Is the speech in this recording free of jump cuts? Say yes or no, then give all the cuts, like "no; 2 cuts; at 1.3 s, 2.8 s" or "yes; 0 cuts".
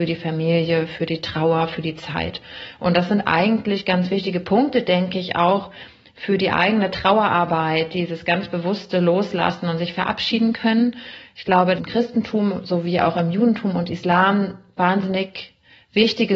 no; 1 cut; at 11.8 s